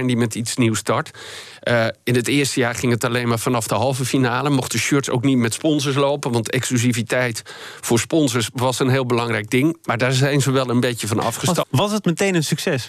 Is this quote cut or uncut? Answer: cut